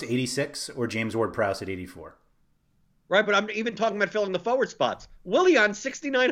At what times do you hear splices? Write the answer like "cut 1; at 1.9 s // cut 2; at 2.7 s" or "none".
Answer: none